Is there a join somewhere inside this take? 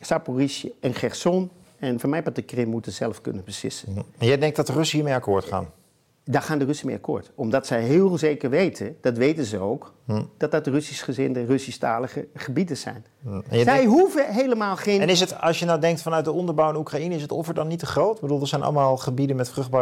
no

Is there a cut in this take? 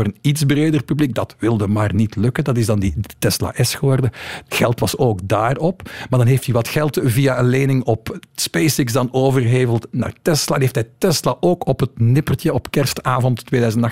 no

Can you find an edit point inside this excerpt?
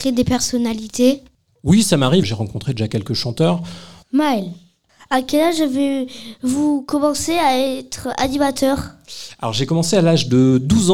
yes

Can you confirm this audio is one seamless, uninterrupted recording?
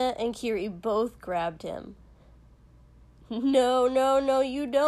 yes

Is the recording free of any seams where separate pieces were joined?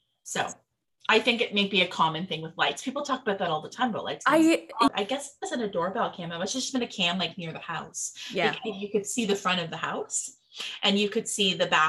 no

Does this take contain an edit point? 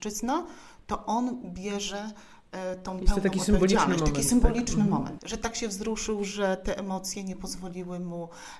yes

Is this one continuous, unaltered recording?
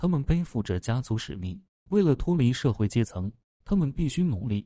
yes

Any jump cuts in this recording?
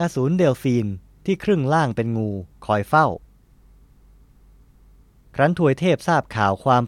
no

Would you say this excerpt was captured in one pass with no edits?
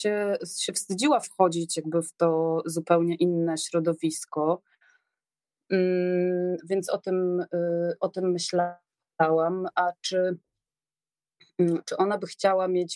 yes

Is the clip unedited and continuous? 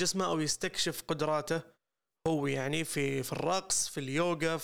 yes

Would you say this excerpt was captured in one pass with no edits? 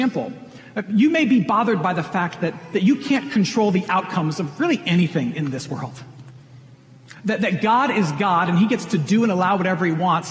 yes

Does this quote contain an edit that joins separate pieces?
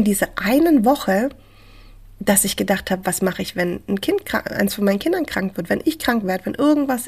no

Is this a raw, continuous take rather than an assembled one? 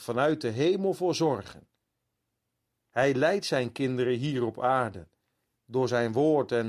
yes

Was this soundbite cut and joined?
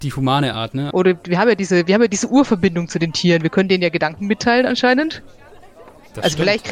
yes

